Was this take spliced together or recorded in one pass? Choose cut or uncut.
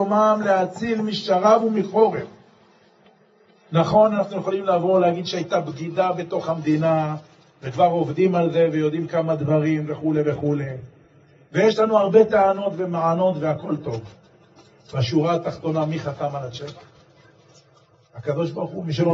uncut